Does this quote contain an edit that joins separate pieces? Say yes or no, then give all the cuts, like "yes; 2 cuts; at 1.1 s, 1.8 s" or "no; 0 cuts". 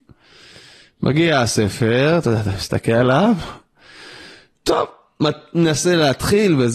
no; 0 cuts